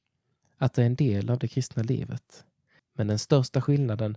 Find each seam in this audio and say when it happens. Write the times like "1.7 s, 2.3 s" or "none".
2.8 s